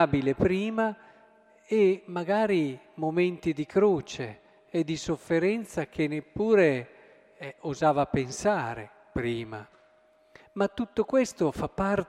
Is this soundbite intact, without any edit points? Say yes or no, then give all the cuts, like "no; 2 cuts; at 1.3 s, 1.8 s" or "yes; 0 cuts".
yes; 0 cuts